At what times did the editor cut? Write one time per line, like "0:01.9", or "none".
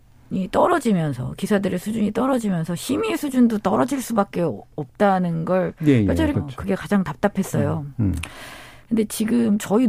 0:06.3